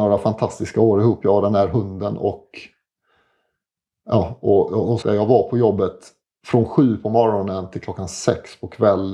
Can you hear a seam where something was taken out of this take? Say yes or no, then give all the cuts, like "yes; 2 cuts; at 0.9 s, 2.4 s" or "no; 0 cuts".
yes; 1 cut; at 5.0 s